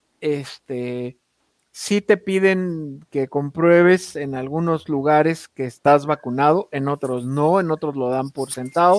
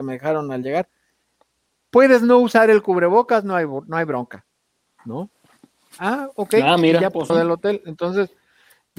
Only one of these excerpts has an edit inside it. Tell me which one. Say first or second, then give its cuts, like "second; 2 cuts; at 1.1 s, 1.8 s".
second; 1 cut; at 7.3 s